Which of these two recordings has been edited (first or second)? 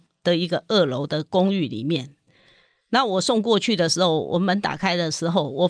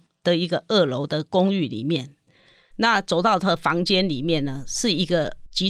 second